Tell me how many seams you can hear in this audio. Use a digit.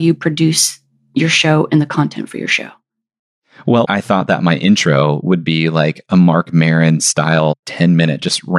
1